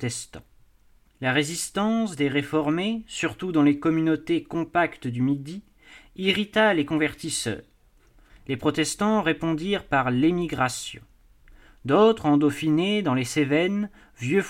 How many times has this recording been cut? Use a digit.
2